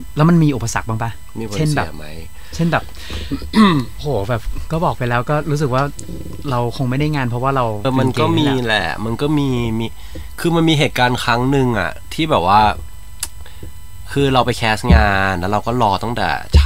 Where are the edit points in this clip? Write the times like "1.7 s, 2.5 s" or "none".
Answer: 7.8 s